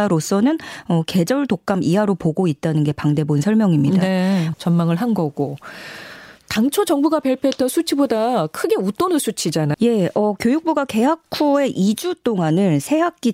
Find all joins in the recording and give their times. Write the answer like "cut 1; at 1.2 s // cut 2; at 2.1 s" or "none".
cut 1; at 4.5 s // cut 2; at 9.7 s